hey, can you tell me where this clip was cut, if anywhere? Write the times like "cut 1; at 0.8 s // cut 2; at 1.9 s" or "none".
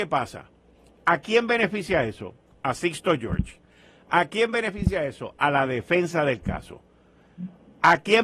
none